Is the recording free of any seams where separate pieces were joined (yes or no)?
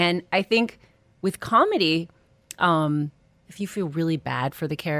no